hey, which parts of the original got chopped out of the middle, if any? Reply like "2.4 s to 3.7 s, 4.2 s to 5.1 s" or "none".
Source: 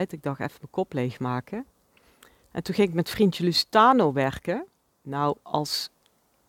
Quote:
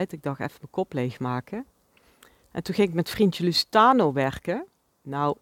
none